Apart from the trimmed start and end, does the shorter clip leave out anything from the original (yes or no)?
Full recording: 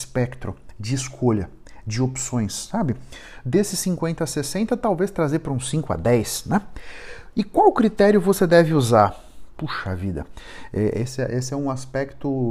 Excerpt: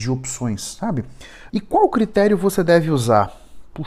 yes